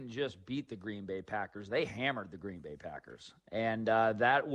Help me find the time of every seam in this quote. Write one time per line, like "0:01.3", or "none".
none